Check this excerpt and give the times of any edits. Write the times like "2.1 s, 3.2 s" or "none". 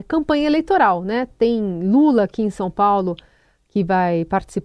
none